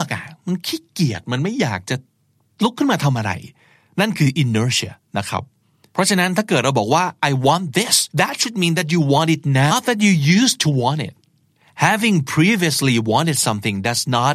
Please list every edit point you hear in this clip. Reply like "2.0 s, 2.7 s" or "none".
8.1 s, 9.7 s